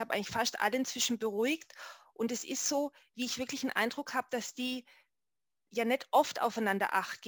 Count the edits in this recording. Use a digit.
0